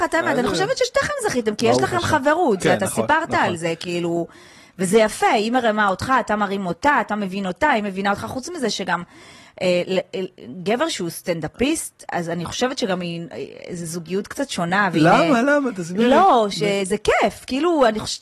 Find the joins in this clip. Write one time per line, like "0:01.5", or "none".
none